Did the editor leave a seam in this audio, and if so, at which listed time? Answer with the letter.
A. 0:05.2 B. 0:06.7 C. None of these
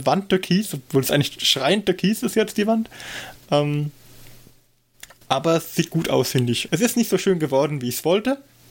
B